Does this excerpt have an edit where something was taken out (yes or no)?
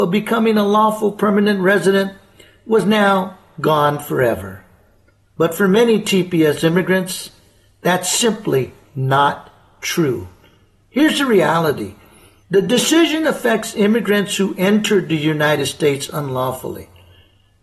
no